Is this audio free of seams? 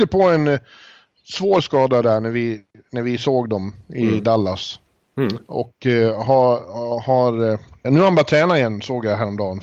no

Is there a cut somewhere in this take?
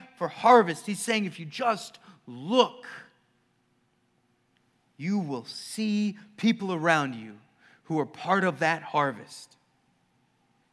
no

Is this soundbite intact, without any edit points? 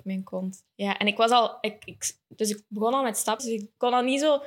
no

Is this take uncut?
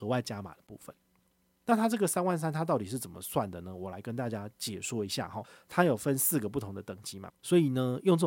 no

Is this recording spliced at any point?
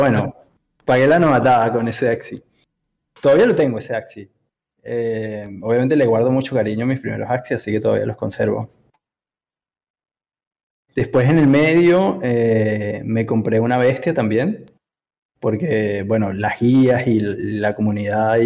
no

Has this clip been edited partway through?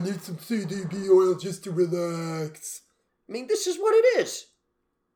yes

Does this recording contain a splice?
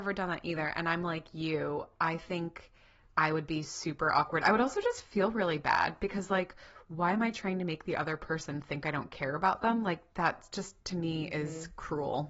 no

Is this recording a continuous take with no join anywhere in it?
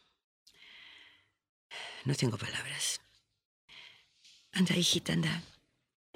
yes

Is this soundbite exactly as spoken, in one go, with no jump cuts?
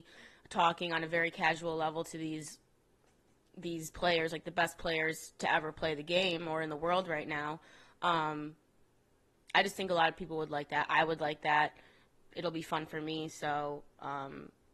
yes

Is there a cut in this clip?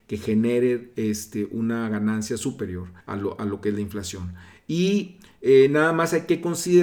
yes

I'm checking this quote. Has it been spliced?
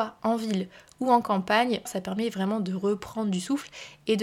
yes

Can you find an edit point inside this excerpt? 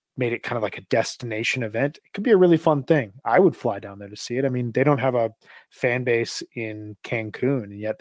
no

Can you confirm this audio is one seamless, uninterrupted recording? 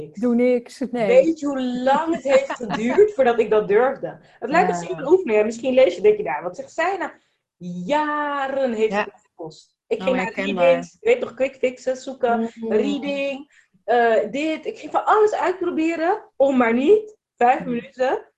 yes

